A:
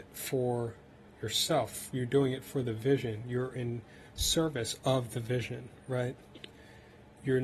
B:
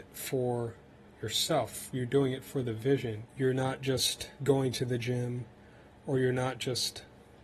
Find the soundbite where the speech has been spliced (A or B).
B